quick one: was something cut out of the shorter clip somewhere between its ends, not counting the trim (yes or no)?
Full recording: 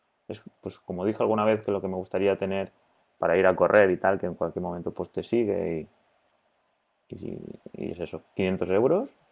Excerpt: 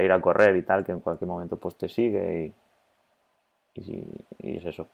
no